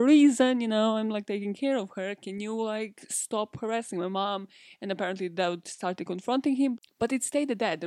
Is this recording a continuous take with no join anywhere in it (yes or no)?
yes